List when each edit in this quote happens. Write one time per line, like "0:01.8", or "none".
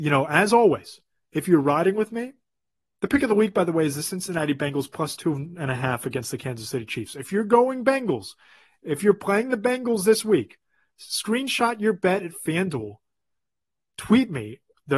none